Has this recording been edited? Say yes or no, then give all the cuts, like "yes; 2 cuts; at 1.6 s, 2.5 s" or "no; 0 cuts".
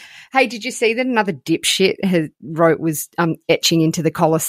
no; 0 cuts